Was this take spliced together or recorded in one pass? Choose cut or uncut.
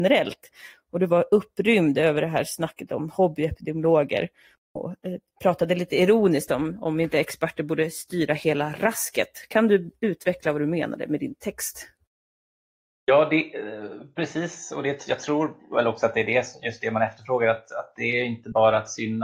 uncut